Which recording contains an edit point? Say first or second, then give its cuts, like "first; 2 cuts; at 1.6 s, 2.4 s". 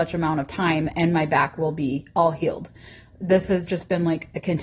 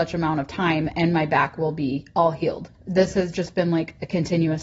second; 1 cut; at 2.8 s